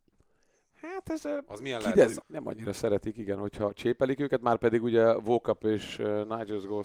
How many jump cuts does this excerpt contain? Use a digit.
1